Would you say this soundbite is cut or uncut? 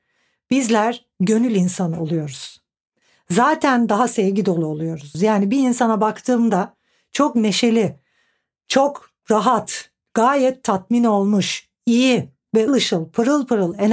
cut